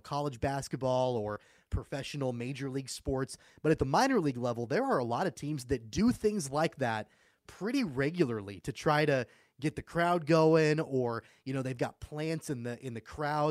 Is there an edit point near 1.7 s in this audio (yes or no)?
yes